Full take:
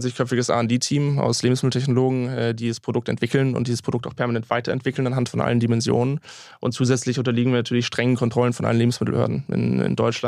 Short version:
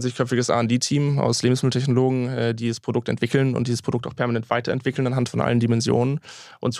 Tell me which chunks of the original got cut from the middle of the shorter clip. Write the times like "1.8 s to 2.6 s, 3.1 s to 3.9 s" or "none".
none

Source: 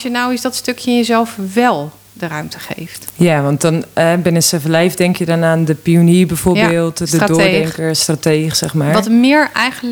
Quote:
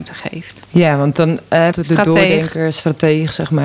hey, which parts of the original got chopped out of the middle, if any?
4.2 s to 6.9 s

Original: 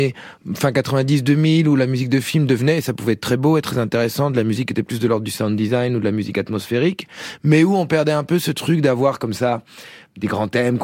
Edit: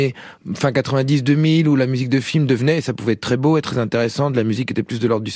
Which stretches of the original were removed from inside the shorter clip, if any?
none

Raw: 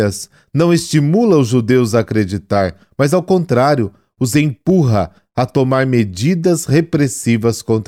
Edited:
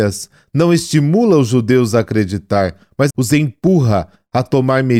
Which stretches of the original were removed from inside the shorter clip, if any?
3.1 s to 4.1 s

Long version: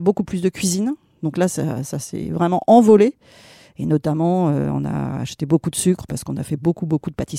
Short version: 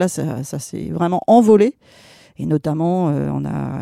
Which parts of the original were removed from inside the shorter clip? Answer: none

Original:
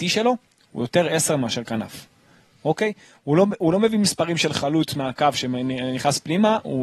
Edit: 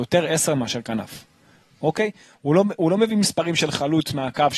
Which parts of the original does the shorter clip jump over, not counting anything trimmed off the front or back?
none

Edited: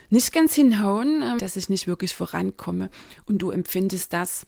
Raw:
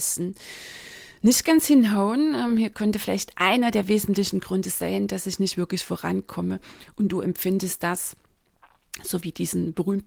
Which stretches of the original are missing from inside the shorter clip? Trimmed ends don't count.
2.5 s to 5.1 s

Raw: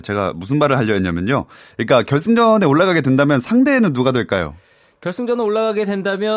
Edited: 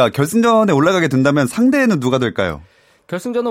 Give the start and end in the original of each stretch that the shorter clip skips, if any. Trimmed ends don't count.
none

